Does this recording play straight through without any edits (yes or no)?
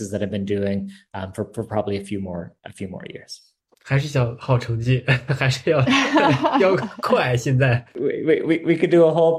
yes